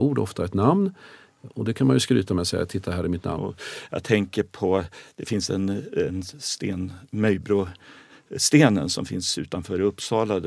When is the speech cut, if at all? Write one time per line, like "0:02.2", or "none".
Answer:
0:03.4